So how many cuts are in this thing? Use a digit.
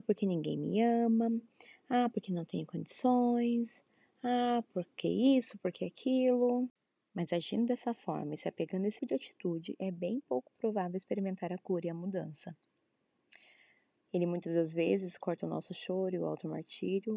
2